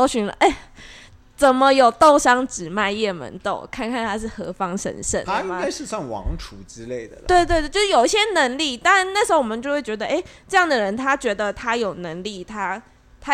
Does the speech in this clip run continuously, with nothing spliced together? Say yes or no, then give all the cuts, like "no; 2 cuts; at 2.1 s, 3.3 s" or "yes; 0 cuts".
no; 1 cut; at 5.2 s